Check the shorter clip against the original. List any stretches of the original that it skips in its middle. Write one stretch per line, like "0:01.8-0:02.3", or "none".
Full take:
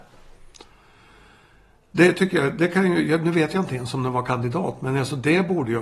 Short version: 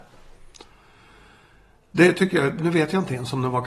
0:02.6-0:03.2